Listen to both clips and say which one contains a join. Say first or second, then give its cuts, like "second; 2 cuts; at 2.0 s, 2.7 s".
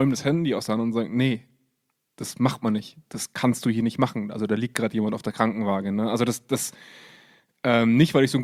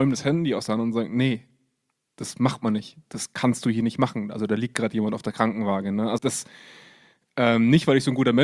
second; 1 cut; at 6.2 s